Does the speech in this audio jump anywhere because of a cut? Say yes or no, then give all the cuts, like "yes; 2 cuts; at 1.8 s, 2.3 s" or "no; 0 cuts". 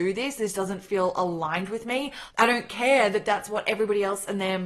yes; 1 cut; at 2.3 s